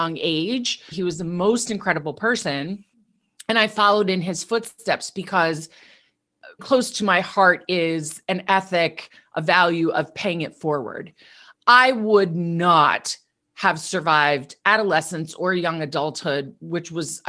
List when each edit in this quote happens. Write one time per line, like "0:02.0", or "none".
0:00.9
0:06.6